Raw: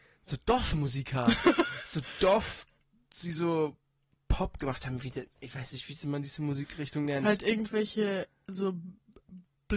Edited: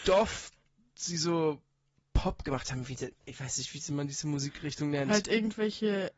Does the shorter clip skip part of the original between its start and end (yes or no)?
no